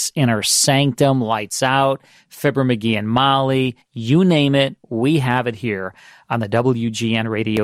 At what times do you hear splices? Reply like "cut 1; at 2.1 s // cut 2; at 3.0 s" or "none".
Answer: none